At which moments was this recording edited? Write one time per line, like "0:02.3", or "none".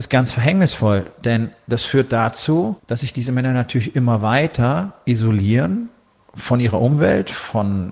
0:02.8